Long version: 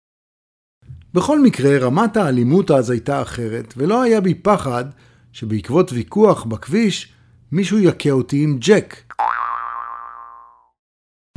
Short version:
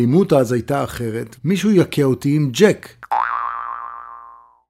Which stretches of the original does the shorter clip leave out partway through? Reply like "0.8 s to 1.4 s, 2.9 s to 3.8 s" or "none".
3.7 s to 7.4 s